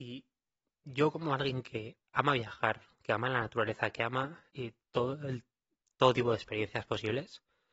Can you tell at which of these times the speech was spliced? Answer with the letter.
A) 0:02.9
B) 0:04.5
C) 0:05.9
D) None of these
B